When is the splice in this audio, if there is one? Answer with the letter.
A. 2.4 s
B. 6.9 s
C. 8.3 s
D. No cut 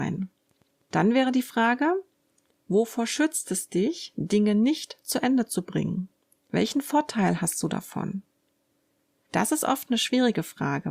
D